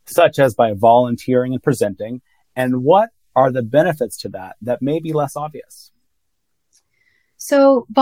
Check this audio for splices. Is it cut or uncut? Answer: uncut